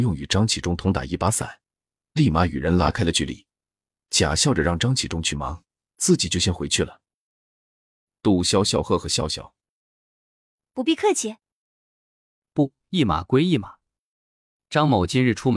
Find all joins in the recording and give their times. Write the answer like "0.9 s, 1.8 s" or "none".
7.4 s

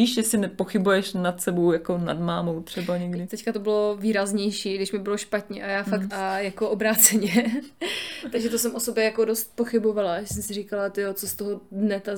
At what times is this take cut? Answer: 3.3 s, 6.1 s

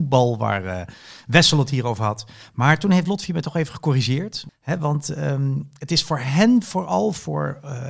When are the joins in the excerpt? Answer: 4.5 s

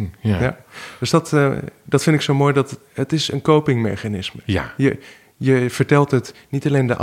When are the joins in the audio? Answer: none

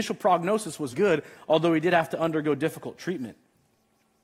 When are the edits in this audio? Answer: 0.9 s

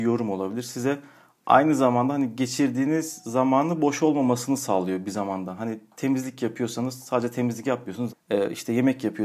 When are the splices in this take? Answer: 8.1 s

